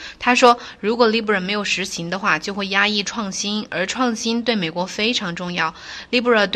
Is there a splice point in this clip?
no; 0 cuts

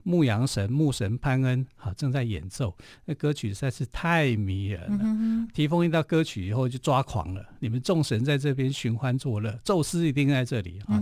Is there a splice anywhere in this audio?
no; 0 cuts

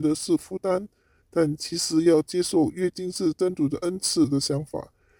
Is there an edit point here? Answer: no; 0 cuts

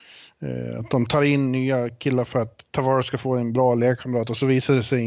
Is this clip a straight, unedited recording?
no; 1 cut; at 2.3 s

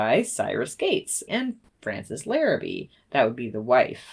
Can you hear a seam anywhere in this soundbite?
yes; 1 cut; at 1.3 s

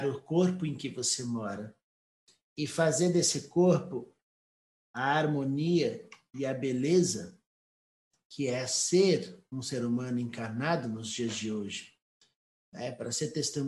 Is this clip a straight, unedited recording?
yes; 0 cuts

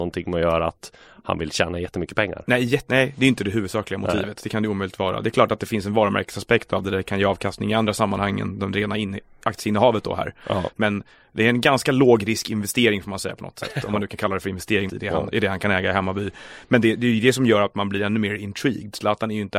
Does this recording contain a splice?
yes; 1 cut; at 14.9 s

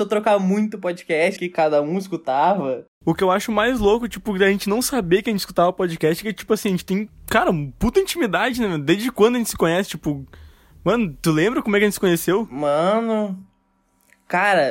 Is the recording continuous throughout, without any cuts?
no; 1 cut; at 1.4 s

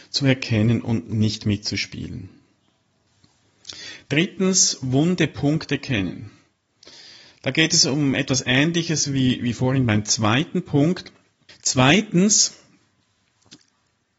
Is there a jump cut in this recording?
yes; 1 cut; at 11.5 s

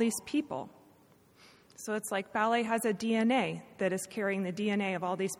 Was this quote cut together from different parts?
no; 0 cuts

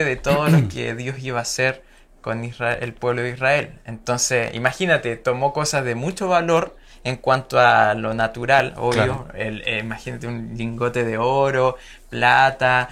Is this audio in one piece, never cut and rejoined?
yes; 0 cuts

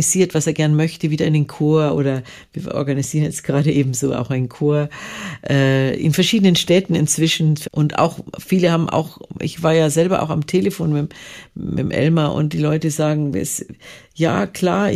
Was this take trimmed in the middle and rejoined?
yes; 1 cut; at 7.6 s

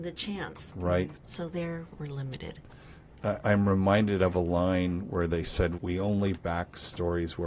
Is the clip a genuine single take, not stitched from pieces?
no; 3 cuts; at 1.1 s, 3.4 s, 5.7 s

